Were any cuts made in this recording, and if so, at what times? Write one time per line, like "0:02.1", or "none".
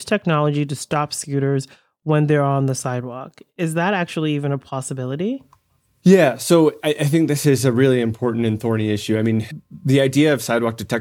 none